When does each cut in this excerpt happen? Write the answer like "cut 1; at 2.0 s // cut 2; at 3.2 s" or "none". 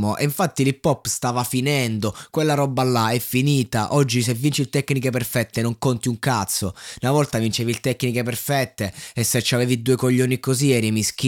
none